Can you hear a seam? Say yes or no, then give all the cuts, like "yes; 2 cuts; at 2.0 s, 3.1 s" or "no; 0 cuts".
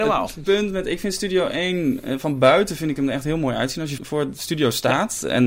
yes; 1 cut; at 4.0 s